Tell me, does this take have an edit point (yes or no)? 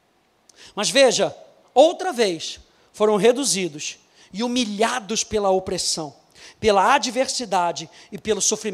no